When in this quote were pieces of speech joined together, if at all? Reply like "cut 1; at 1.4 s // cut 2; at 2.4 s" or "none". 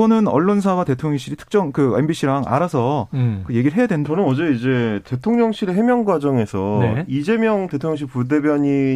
cut 1; at 4.1 s